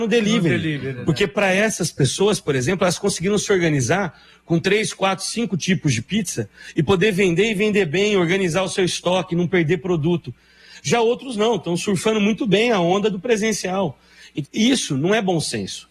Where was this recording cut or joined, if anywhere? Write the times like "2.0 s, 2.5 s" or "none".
14.4 s